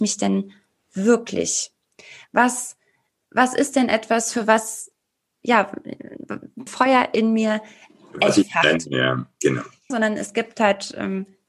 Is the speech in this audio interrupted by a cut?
yes; 2 cuts; at 6.7 s, 9.9 s

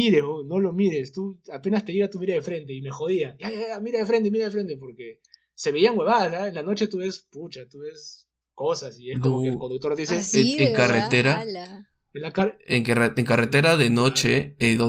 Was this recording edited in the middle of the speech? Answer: no; 0 cuts

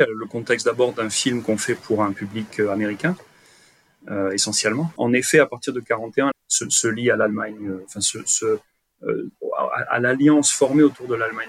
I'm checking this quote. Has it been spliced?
yes; 3 cuts; at 5.0 s, 6.3 s, 9.3 s

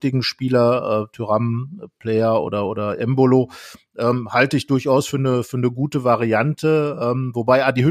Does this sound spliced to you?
no; 0 cuts

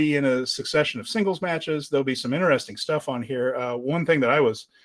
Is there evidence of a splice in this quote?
no; 0 cuts

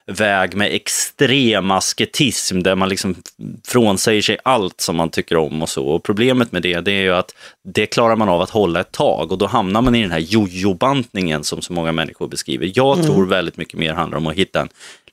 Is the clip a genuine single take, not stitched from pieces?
yes; 0 cuts

